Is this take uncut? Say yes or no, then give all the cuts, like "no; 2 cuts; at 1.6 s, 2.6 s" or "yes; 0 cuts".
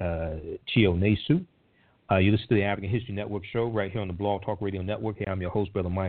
yes; 0 cuts